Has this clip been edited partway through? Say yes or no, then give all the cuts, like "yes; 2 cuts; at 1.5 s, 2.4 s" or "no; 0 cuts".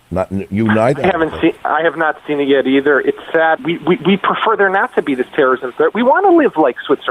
yes; 1 cut; at 3.6 s